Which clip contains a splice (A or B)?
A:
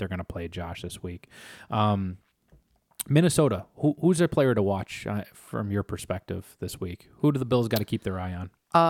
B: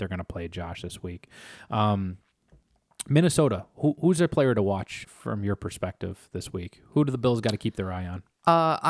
B